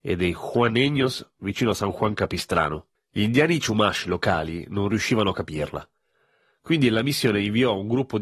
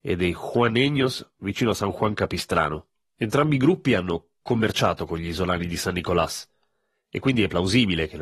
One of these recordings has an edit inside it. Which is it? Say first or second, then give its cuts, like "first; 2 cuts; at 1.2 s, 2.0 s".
first; 1 cut; at 3.0 s